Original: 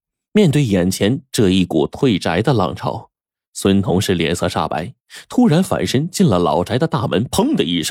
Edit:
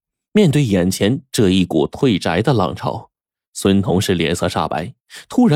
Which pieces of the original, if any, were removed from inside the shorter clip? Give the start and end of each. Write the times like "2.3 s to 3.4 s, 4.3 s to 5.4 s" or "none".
none